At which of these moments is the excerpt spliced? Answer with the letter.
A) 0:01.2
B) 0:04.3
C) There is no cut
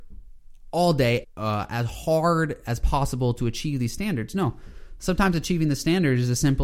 A